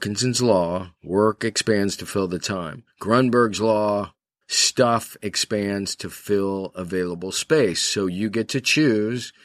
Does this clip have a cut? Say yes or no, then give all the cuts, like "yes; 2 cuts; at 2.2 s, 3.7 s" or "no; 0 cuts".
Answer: yes; 1 cut; at 4.4 s